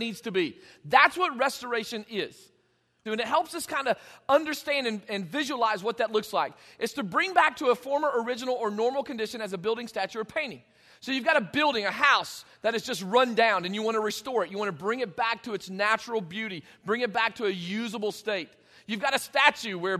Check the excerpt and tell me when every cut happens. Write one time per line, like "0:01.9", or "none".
0:03.1